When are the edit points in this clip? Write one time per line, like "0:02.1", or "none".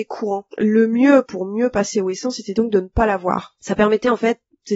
0:01.3